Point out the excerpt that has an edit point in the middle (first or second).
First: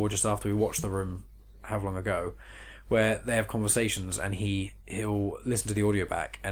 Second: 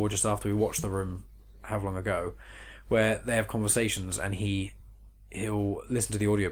first